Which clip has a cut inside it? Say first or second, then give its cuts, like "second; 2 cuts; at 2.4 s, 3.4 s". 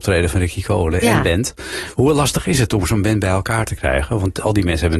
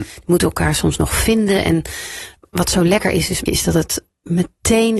second; 1 cut; at 3.5 s